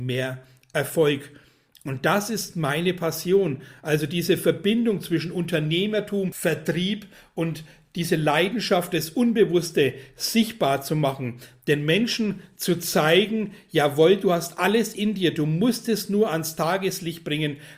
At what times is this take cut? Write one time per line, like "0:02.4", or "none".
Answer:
none

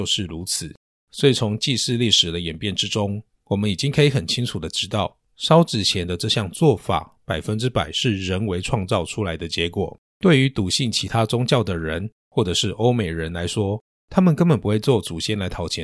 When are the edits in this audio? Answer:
0:10.1

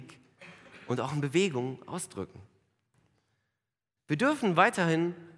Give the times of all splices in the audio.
0:04.0

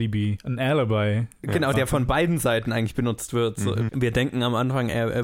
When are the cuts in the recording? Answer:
0:01.7
0:03.9

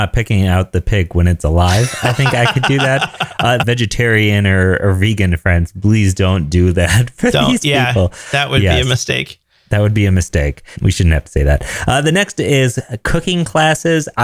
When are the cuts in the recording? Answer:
0:03.6

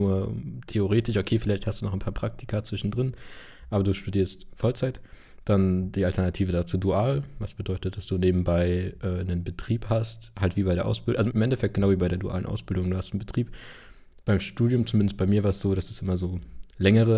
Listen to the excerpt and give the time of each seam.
0:11.3

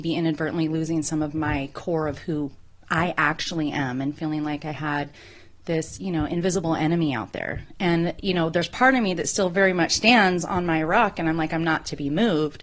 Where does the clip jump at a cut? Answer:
none

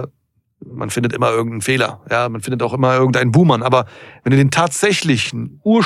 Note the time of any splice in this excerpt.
none

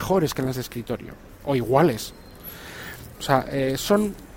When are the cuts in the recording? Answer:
0:03.1

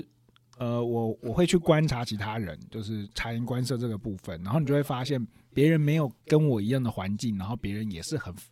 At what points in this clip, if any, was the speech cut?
0:06.2

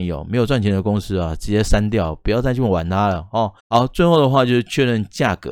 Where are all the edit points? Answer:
0:03.6

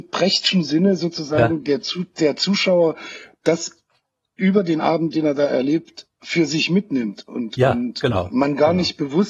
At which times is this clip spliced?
none

